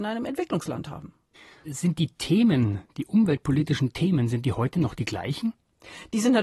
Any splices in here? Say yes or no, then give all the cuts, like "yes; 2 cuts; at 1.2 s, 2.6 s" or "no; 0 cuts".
yes; 1 cut; at 1.6 s